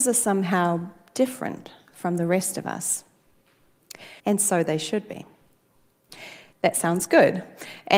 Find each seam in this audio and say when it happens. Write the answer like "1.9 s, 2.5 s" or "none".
4.2 s, 6.5 s

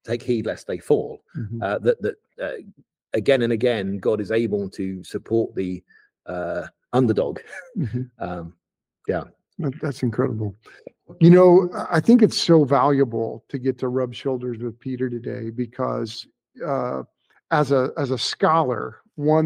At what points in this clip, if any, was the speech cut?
none

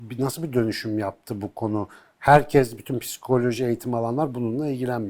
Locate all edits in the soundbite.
none

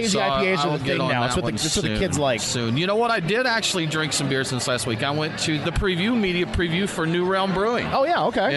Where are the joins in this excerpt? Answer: 5.6 s

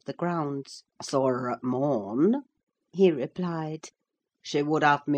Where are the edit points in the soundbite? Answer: 0.9 s

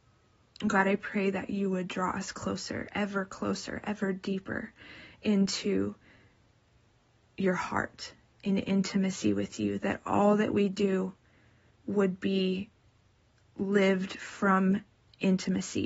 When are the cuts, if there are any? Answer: none

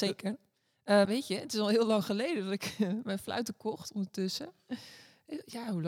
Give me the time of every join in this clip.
1.0 s

